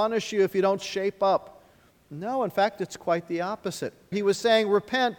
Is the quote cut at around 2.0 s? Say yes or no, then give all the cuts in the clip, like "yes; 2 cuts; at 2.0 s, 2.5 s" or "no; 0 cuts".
no; 1 cut; at 4.1 s